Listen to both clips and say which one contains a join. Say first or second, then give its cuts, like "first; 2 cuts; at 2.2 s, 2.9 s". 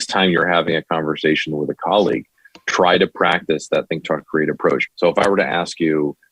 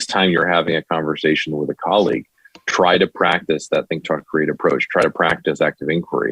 first; 1 cut; at 4.9 s